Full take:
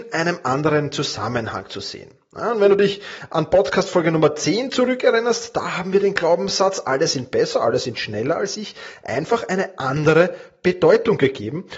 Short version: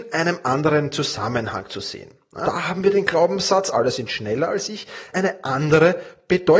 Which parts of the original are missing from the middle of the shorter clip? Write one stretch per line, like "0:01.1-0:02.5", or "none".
0:02.4-0:05.5
0:06.8-0:07.6
0:09.0-0:09.5